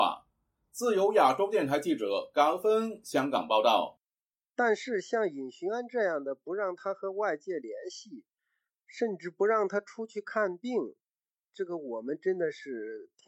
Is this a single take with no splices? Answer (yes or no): no